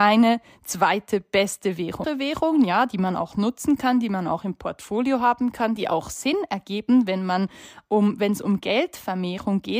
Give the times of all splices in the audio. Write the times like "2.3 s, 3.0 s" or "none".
2.0 s

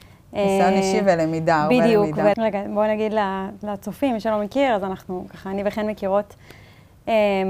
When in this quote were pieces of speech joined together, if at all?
2.3 s

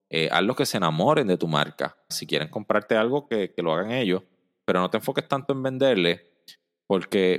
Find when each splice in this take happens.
2.1 s

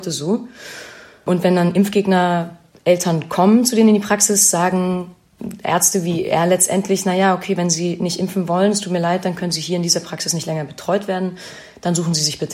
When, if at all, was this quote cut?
none

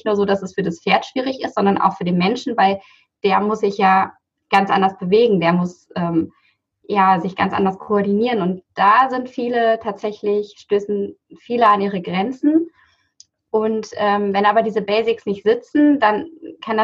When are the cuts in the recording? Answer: none

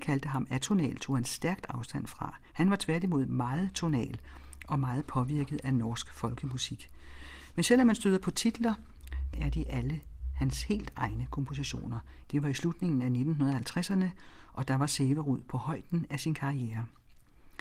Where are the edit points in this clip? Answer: 9.3 s, 12.2 s

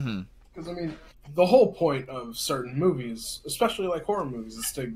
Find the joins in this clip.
none

